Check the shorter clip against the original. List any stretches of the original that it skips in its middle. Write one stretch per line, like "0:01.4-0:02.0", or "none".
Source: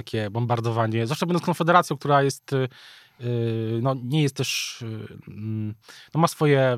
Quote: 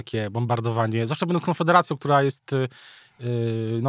none